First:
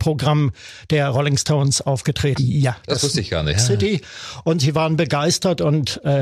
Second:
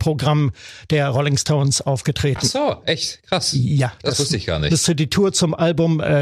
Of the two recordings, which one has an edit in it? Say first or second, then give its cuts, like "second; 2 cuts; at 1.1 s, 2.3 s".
first; 2 cuts; at 2.4 s, 3.5 s